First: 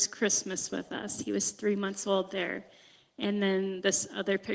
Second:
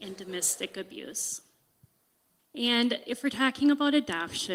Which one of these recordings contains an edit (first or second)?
second